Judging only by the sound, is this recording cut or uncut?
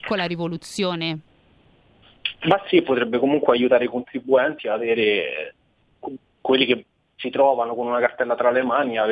uncut